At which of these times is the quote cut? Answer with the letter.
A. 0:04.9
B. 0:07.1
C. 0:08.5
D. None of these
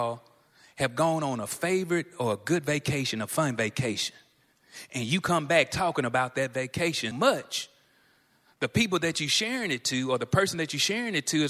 B